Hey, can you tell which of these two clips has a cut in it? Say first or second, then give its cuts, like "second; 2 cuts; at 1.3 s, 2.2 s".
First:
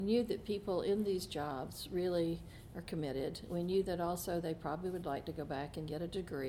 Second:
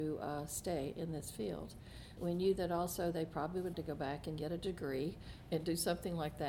second; 2 cuts; at 2.2 s, 3.7 s